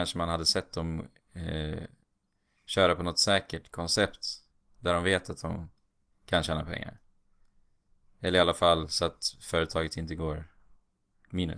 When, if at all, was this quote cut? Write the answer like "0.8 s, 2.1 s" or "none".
none